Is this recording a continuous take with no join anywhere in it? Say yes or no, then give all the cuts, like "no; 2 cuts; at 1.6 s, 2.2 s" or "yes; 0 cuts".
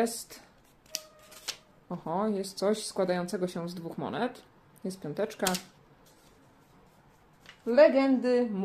yes; 0 cuts